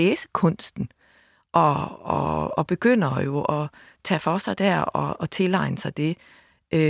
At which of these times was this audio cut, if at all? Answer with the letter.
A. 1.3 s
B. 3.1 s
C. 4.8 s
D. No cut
D